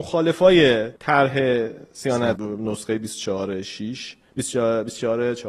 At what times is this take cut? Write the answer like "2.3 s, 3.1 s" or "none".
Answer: 1.0 s, 2.4 s